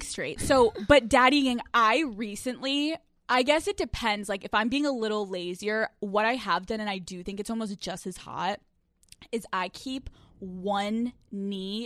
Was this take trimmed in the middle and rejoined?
no; 0 cuts

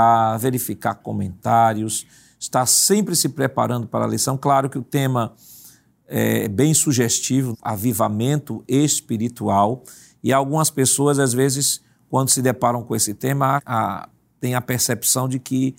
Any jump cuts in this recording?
yes; 2 cuts; at 7.5 s, 13.6 s

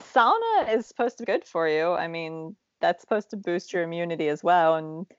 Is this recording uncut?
no; 1 cut; at 1.2 s

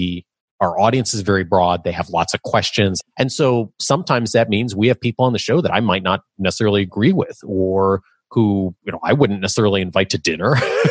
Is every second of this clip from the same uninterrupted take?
no; 1 cut; at 3.0 s

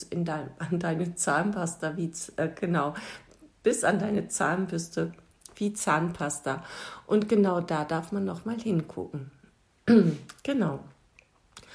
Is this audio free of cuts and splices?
yes; 0 cuts

